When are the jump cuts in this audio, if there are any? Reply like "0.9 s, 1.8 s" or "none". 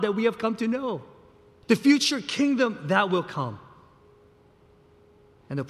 1.6 s